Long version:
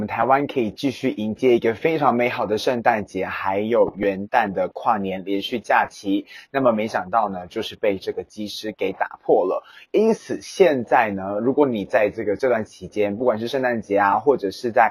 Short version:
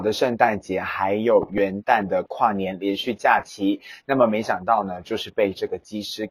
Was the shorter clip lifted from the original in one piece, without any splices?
yes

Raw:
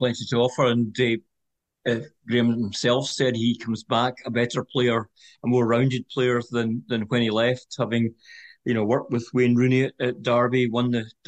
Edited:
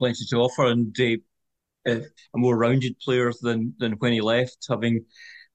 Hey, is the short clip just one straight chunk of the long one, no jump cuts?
no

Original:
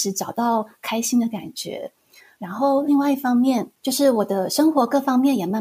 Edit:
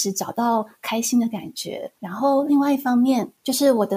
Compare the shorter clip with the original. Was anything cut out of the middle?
yes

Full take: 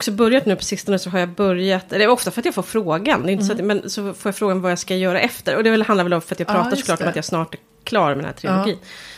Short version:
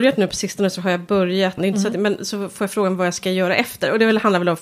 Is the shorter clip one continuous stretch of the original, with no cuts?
no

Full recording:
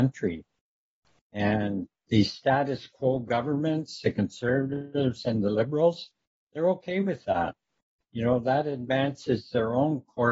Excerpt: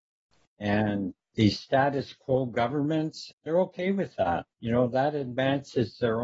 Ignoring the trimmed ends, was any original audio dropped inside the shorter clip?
yes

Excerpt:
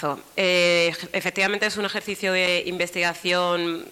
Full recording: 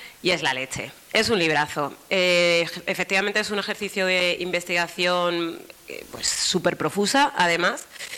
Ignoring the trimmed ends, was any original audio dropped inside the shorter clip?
no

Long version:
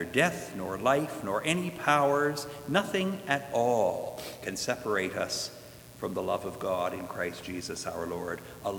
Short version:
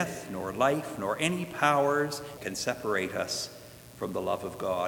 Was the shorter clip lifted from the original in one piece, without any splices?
no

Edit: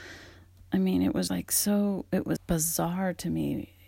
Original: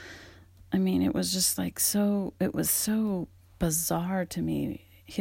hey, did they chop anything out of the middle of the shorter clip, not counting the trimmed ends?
yes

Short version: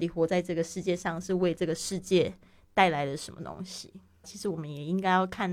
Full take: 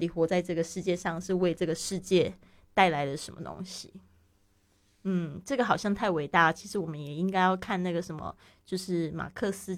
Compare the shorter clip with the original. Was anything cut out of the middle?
yes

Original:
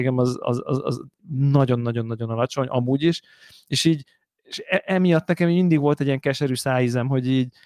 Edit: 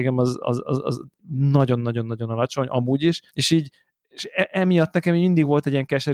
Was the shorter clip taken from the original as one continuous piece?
no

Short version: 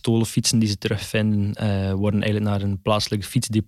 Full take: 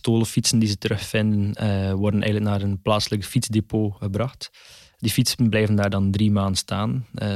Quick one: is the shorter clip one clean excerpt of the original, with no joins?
yes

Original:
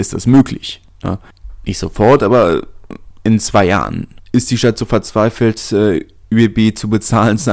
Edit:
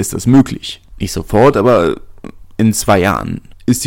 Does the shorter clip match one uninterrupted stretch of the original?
no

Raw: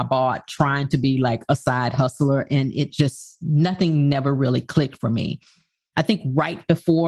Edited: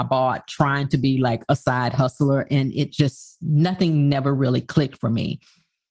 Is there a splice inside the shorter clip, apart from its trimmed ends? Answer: no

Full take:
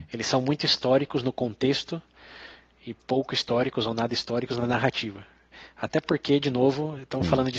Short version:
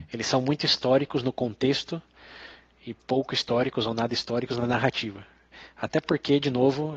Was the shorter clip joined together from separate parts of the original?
no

